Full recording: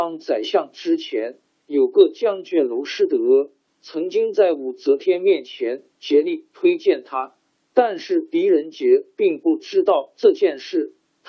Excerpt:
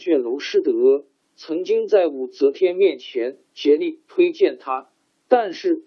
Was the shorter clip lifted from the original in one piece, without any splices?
yes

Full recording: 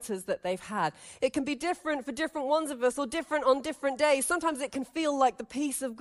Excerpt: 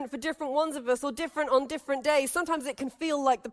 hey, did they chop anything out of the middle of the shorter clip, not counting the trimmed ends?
no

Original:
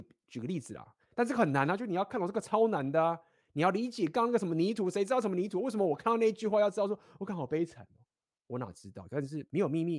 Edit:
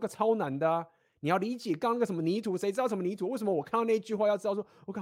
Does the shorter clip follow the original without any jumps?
yes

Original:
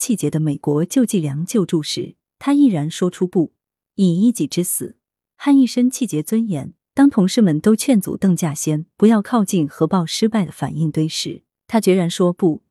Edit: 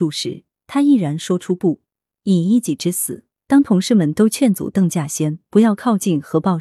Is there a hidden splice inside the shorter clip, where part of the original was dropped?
yes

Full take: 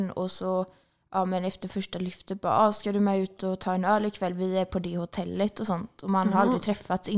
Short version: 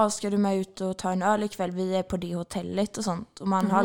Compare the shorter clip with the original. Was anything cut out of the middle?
no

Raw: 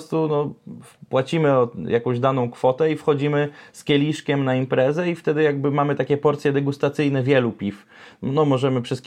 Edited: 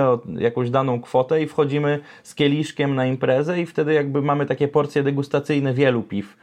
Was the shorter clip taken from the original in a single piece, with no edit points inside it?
yes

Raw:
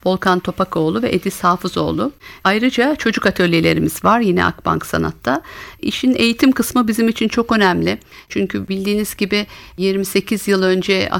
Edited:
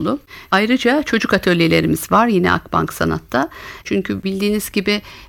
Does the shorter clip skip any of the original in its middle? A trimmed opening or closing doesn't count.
yes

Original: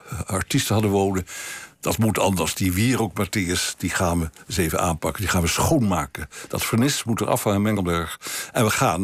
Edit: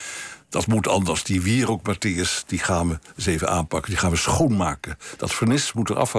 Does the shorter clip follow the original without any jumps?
yes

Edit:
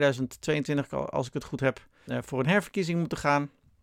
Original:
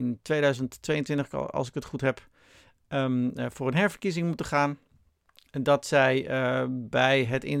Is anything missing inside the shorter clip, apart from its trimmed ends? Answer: yes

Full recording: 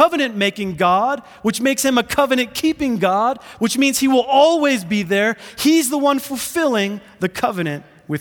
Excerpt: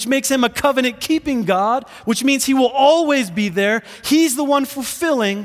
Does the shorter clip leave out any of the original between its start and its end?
no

